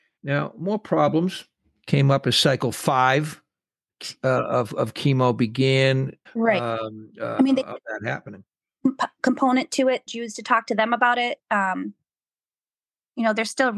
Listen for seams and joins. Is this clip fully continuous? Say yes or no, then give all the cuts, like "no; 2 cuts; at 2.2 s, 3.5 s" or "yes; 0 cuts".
no; 2 cuts; at 6.3 s, 10.1 s